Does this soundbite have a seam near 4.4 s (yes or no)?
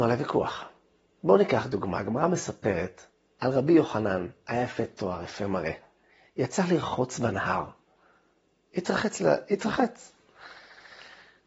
no